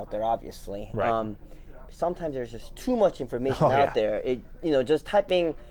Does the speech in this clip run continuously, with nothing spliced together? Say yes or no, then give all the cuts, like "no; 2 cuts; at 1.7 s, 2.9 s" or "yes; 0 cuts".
no; 1 cut; at 1.9 s